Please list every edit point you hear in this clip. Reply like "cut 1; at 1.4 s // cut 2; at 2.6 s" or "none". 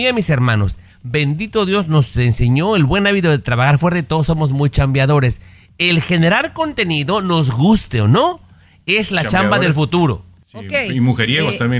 none